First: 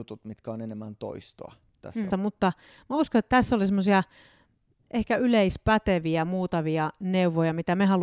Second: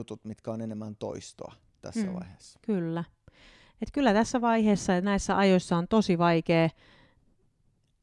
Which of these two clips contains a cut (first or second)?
first